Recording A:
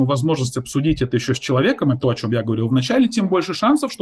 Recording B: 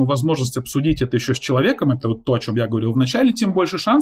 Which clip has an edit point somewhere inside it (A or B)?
A